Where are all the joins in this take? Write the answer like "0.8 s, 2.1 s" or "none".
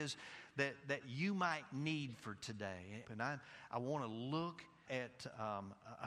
3.0 s, 4.9 s